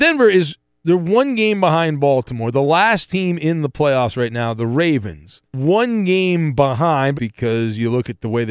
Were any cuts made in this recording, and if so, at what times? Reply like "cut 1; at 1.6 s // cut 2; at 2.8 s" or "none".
cut 1; at 5.4 s // cut 2; at 7.1 s